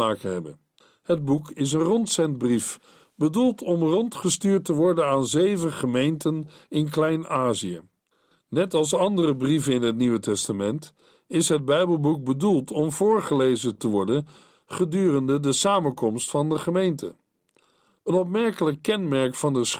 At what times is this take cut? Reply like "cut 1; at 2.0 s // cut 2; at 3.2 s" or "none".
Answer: none